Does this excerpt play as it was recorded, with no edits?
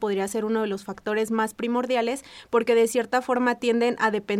yes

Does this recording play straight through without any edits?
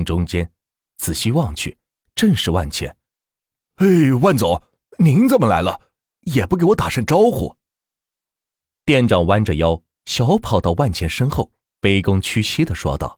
yes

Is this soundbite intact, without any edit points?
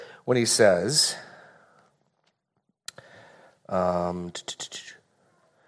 yes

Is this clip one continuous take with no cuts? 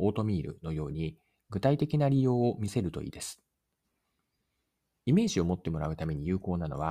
yes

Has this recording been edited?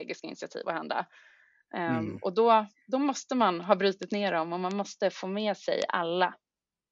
no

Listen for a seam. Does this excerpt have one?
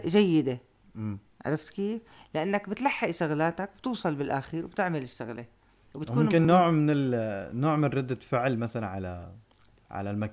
no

